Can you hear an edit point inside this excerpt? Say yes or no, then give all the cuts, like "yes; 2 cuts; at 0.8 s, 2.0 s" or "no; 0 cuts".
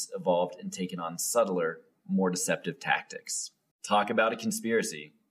yes; 1 cut; at 3.7 s